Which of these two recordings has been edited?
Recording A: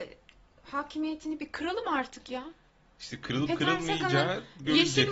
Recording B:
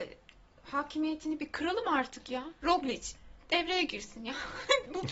B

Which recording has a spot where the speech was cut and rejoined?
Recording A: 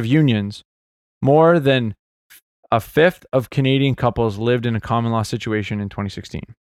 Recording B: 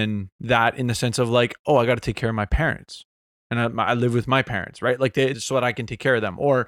B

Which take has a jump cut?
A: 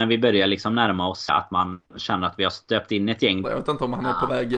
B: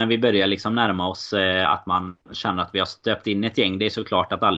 A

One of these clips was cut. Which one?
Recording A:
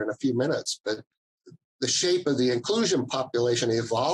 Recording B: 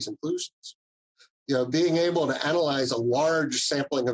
B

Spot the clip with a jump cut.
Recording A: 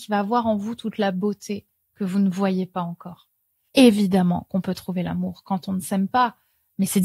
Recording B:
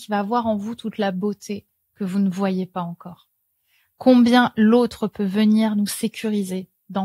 A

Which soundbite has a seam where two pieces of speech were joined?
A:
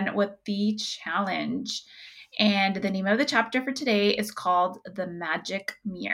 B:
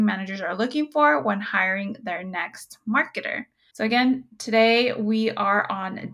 B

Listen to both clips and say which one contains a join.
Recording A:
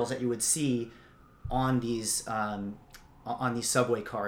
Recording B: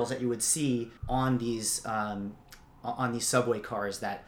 B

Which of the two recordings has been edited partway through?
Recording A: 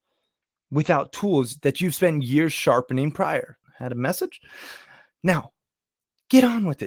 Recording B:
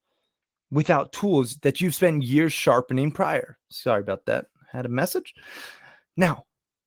A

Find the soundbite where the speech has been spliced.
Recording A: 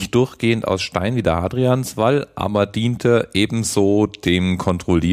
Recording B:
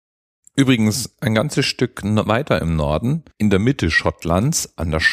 B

